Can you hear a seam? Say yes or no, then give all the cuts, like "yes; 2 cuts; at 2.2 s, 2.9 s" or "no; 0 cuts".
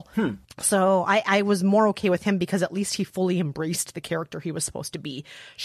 no; 0 cuts